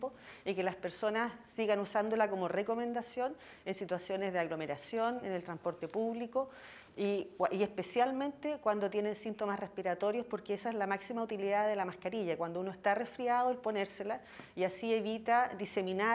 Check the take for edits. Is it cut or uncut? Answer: uncut